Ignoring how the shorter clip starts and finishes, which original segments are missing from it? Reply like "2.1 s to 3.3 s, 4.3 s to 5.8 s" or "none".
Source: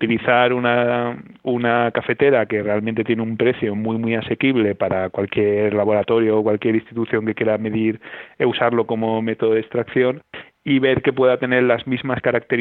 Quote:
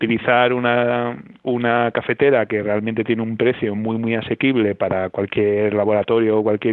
none

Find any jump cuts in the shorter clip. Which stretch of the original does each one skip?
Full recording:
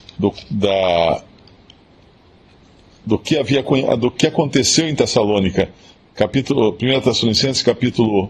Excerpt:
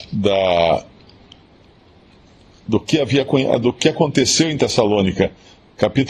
none

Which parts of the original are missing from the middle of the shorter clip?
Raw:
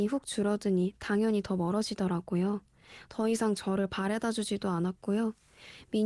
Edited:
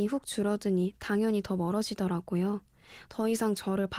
none

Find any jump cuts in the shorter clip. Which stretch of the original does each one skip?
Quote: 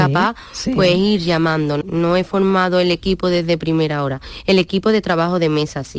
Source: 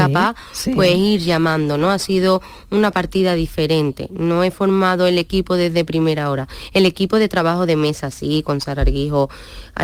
1.8 s to 4.1 s

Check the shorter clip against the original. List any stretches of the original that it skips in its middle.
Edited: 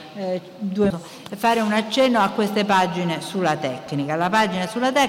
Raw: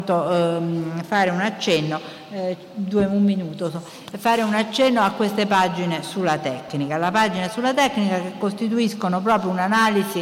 3.1 s to 3.7 s

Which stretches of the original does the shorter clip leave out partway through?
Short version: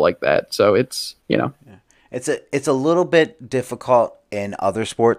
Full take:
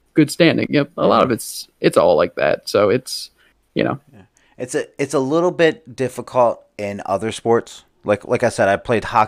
3.4 s to 3.7 s

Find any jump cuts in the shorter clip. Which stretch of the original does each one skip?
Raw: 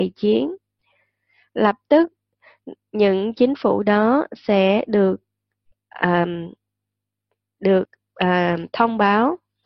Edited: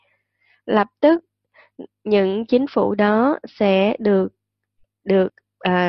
5.8 s to 7.5 s

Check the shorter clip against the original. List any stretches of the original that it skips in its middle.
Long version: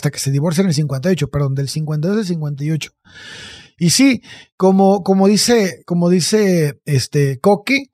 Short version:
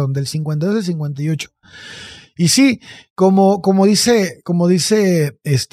none

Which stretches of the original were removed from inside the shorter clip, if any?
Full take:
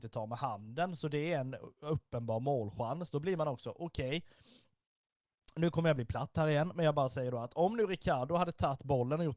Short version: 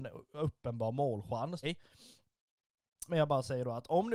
3.1 s to 4.1 s, 5.5 s to 6.7 s

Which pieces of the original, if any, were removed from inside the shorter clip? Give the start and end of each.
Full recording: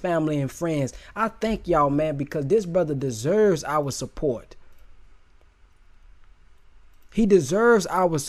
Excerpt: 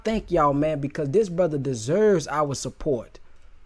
none

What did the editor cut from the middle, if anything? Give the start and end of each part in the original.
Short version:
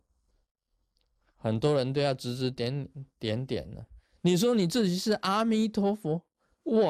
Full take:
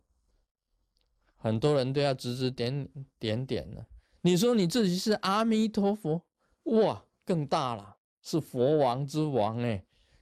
none

